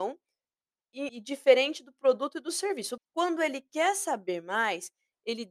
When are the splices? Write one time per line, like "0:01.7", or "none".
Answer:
0:01.1
0:03.0